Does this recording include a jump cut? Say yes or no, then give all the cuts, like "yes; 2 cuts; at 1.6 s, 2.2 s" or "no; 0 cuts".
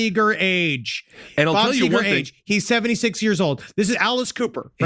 no; 0 cuts